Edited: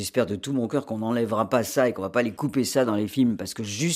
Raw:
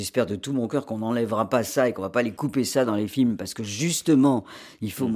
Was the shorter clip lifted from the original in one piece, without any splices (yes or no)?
yes